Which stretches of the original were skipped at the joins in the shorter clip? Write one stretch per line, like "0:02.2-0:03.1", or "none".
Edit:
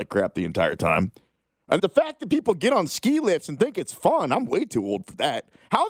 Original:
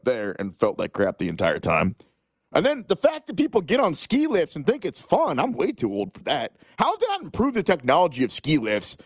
0:02.6-0:02.9

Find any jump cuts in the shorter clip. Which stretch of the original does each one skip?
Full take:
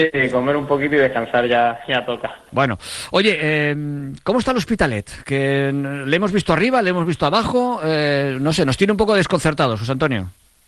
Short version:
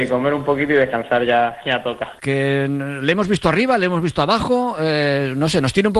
0:02.4-0:05.2

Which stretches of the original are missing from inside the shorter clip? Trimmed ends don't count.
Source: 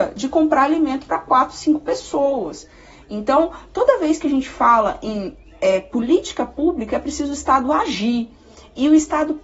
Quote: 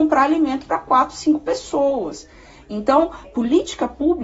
0:03.6-0:05.8

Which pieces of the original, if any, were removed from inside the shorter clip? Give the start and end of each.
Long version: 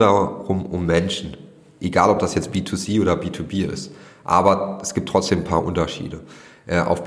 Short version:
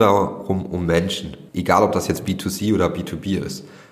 0:01.5-0:01.8

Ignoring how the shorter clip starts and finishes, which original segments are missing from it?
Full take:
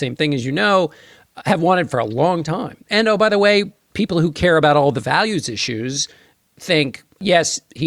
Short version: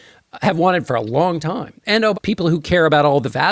0:03.2-0:03.9

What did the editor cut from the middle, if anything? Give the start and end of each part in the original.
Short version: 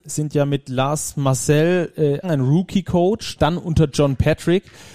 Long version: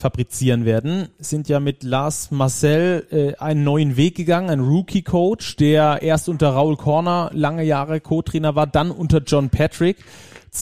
0:03.4-0:04.4
0:05.6-0:08.7

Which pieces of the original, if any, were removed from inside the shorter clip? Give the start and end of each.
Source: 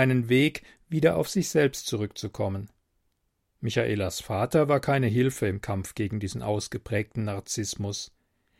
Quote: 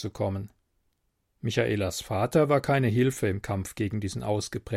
none

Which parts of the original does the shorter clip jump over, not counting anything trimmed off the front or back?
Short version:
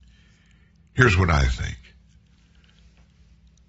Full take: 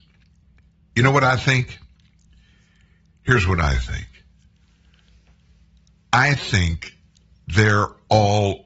none

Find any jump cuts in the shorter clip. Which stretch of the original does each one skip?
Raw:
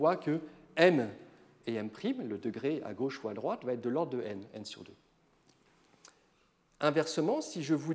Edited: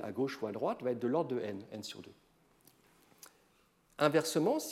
none

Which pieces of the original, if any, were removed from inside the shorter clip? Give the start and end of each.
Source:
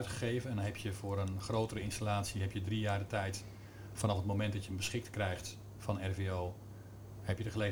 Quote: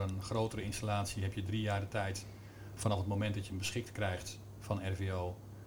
none

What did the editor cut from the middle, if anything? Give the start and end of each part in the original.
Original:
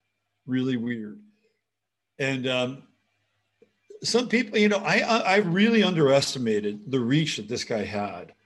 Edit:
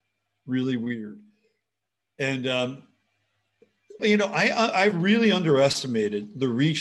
0:04.0-0:04.5

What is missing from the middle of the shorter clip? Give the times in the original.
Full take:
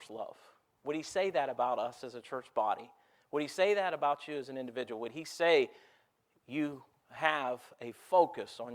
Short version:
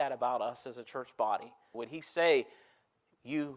0:03.1-0:05.0

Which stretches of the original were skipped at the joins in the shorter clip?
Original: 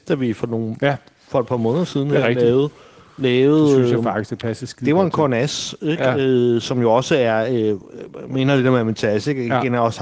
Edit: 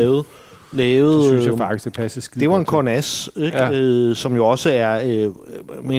none

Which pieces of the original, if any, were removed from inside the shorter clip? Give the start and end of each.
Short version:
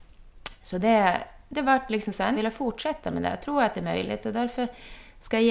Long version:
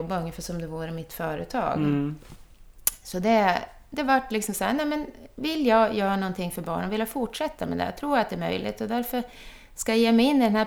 0:04.8-0:06.9

